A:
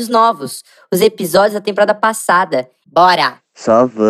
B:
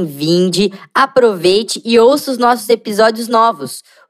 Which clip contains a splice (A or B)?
A